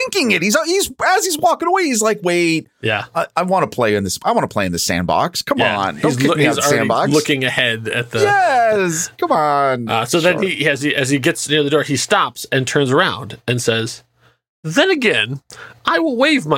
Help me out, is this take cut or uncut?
uncut